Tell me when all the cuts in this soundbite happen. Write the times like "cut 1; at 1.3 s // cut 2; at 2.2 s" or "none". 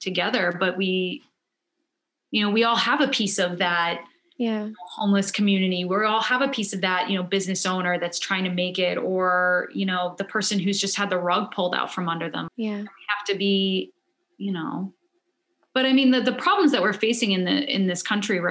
cut 1; at 12.5 s